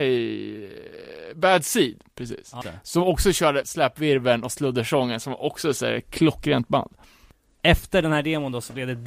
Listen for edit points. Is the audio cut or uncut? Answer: cut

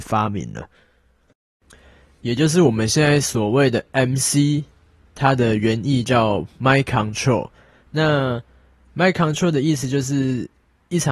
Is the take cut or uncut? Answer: uncut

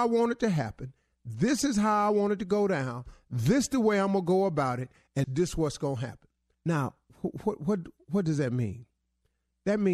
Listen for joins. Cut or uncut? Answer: cut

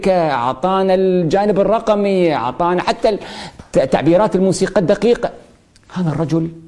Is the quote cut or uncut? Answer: uncut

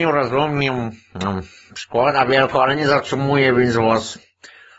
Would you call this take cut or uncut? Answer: uncut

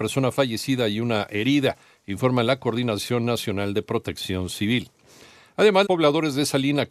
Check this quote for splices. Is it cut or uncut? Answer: cut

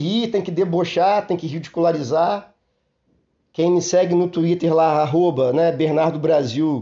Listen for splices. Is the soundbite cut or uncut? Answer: uncut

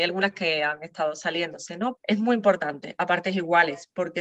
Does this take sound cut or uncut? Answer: cut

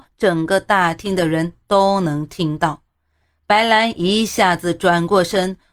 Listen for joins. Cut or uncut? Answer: uncut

